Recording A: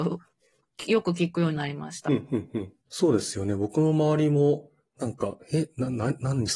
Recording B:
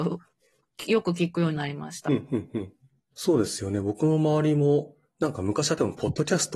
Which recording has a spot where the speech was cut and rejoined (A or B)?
A